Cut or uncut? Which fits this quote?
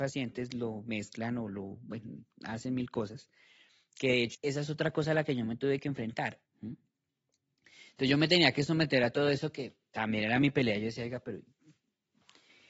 cut